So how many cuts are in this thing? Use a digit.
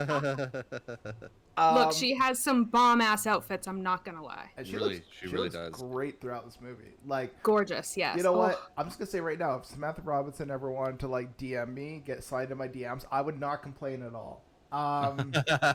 0